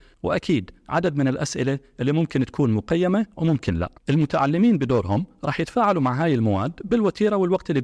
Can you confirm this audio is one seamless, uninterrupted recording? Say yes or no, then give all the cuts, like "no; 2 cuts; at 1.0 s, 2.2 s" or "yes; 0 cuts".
no; 1 cut; at 4.0 s